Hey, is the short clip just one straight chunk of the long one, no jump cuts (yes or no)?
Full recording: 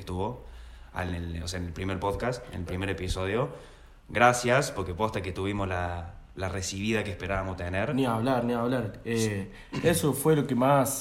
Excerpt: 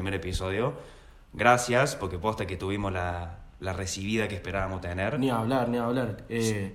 yes